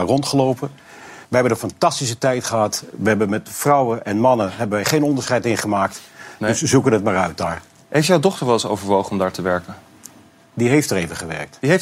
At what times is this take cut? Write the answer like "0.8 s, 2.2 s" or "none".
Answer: 1.2 s